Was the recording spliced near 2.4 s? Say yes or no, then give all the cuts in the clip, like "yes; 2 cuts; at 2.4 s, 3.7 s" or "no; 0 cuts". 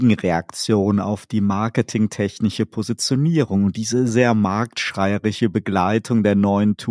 no; 1 cut; at 4.1 s